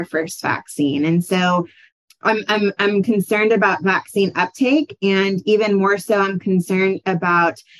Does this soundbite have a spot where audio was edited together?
no; 0 cuts

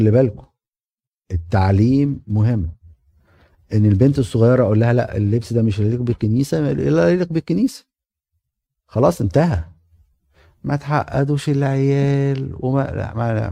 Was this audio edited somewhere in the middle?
no; 0 cuts

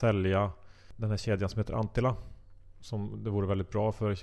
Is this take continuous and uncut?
no; 1 cut; at 2.8 s

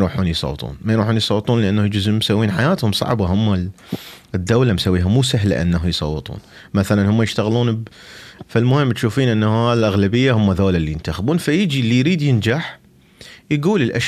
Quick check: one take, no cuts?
no; 1 cut; at 8.4 s

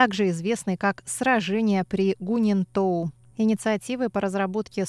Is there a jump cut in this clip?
yes; 1 cut; at 3.3 s

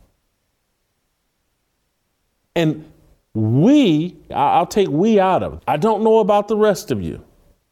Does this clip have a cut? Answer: yes; 2 cuts; at 4.3 s, 5.6 s

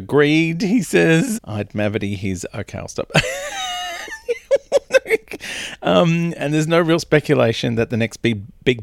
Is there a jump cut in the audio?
yes; 1 cut; at 1.3 s

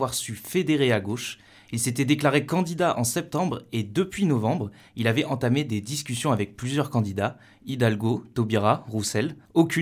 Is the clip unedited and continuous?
yes; 0 cuts

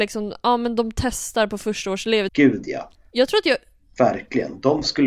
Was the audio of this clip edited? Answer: yes; 1 cut; at 2.3 s

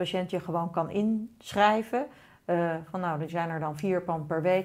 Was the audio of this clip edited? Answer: no; 0 cuts

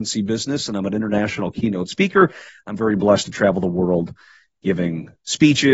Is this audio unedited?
yes; 0 cuts

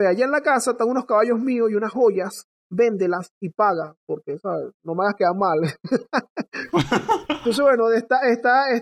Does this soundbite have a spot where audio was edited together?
no; 0 cuts

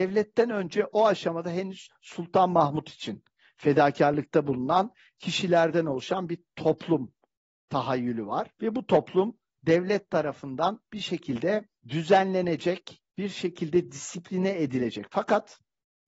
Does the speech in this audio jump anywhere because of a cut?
yes; 3 cuts; at 8.6 s, 11.8 s, 13.1 s

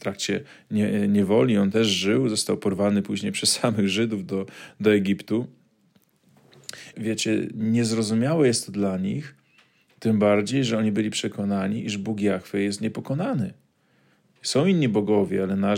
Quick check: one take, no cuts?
no; 1 cut; at 6.9 s

